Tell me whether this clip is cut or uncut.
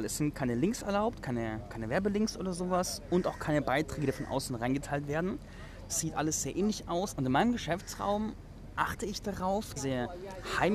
cut